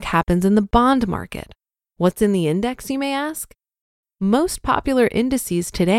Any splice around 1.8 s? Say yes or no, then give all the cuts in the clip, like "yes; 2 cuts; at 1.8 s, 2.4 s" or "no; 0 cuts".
yes; 1 cut; at 1.8 s